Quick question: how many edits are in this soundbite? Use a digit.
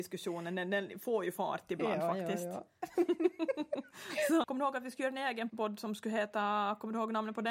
2